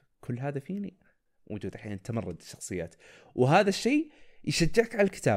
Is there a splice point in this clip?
yes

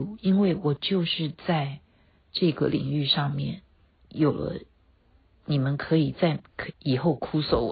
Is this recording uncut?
no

